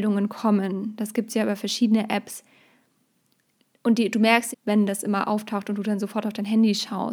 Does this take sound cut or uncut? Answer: cut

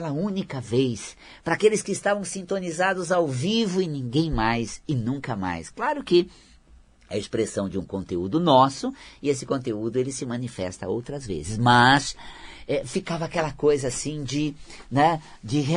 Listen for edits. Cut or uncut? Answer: uncut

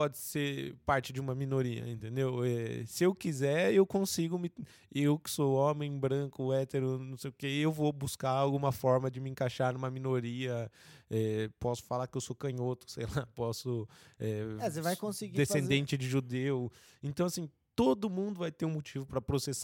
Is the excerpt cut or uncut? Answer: uncut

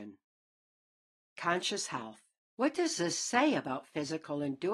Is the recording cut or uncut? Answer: cut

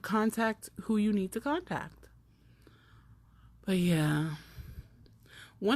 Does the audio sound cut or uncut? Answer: uncut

